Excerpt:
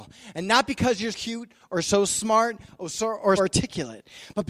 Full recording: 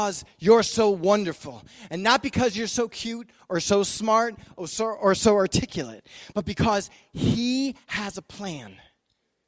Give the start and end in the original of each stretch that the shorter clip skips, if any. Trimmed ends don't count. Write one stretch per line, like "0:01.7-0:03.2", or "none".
0:02.7-0:02.9
0:05.1-0:05.4